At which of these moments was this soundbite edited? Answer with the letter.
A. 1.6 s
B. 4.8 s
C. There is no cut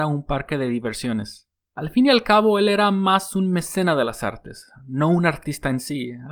C